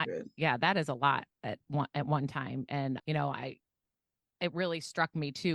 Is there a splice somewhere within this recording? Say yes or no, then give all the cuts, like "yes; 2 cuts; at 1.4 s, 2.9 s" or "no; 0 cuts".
yes; 1 cut; at 3.0 s